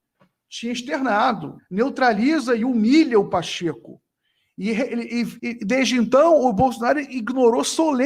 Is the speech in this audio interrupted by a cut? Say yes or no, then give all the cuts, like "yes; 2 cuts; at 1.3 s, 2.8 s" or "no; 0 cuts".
yes; 2 cuts; at 1.6 s, 5.4 s